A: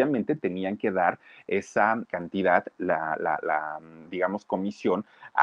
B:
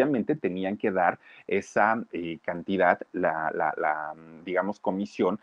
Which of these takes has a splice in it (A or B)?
A